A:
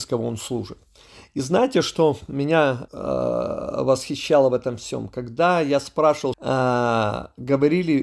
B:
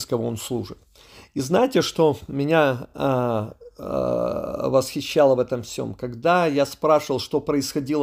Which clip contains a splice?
A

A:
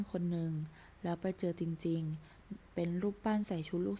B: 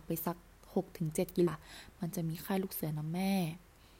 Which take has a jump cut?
B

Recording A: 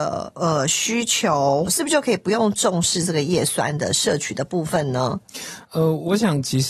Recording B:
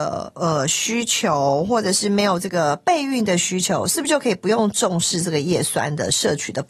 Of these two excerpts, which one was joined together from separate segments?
A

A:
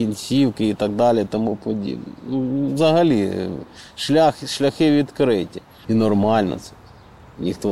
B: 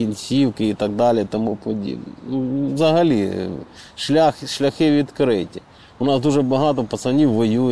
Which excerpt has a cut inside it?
A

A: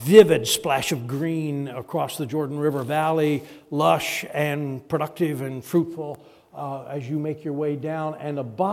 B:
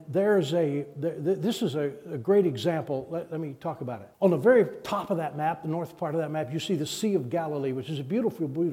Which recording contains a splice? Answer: B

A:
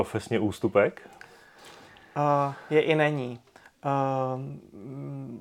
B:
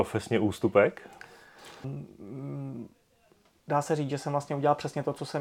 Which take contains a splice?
B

